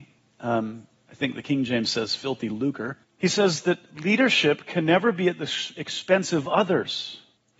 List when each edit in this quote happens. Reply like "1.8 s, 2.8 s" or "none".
3.0 s